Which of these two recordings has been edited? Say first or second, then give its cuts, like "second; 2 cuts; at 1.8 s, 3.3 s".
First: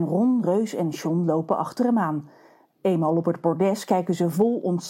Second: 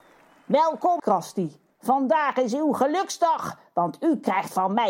second; 1 cut; at 1.0 s